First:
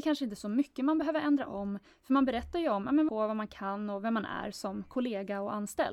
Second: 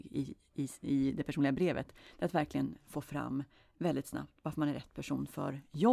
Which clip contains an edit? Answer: first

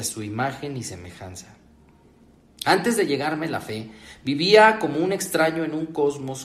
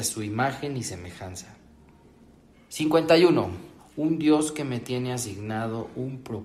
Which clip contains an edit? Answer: second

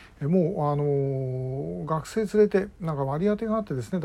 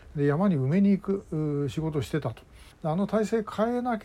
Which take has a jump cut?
second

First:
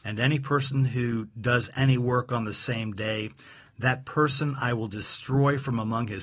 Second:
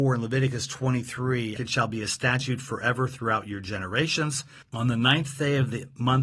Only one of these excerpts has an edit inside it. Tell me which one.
second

